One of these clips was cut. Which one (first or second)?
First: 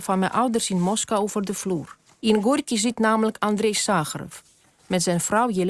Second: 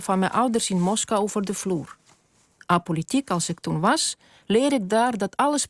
first